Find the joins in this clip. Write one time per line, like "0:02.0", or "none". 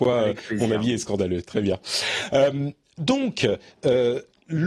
none

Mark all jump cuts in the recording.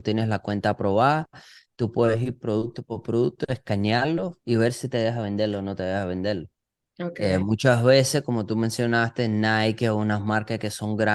none

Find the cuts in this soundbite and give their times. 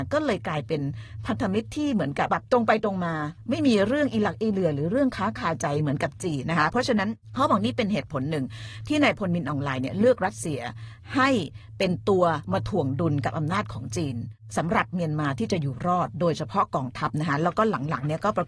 0:02.3
0:06.4

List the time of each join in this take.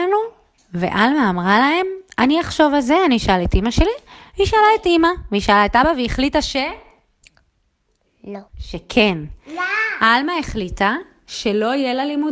0:08.5

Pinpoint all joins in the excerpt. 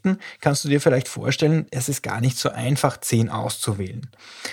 none

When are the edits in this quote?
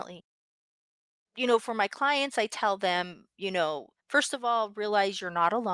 0:01.3
0:04.0

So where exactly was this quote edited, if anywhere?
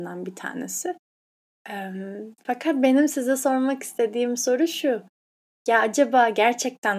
none

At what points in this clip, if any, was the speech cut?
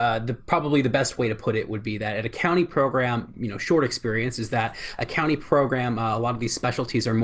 0:03.3

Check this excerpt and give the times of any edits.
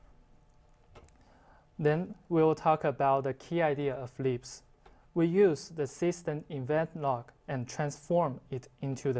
none

